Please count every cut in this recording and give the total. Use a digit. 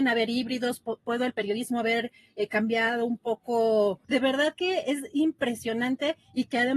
1